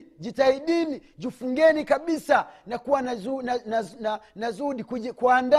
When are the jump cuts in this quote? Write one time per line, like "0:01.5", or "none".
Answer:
none